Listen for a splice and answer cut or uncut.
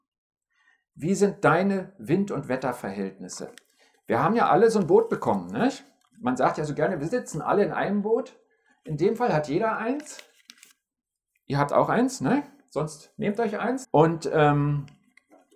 cut